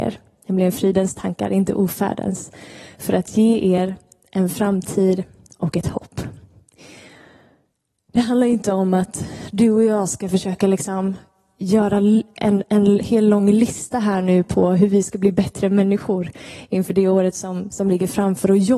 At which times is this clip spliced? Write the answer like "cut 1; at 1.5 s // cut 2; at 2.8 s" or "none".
none